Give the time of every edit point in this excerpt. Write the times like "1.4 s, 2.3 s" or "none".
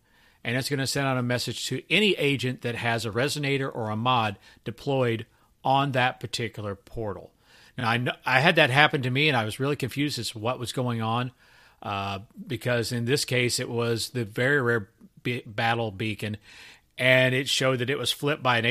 none